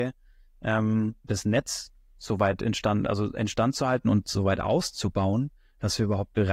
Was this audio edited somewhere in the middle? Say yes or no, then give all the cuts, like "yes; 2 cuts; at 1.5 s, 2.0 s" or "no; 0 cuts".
yes; 1 cut; at 1.2 s